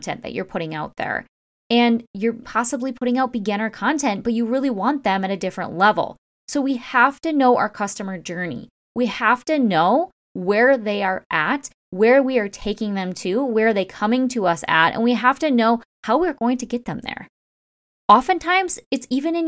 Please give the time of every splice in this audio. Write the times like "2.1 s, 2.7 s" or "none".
2.4 s